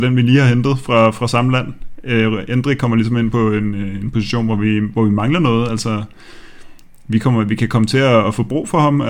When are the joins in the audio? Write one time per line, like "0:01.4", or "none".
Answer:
none

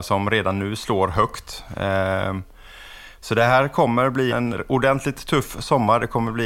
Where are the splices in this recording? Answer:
0:04.3

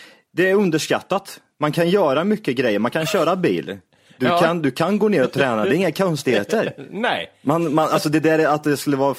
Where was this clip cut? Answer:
none

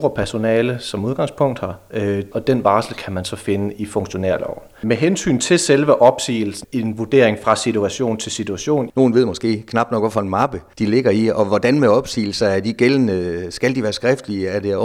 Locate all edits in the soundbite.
0:02.3
0:06.6
0:08.9

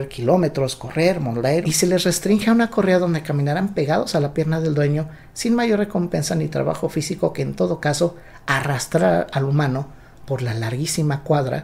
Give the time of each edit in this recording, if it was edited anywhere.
0:01.6

